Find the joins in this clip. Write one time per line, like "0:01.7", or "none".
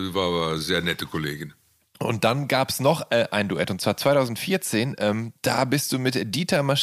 none